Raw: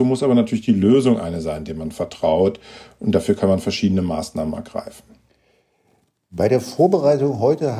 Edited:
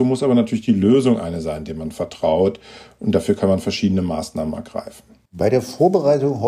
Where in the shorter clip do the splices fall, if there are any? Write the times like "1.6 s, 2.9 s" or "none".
5.3 s